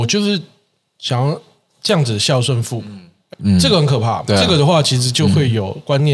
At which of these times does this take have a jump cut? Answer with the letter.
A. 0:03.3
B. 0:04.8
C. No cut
A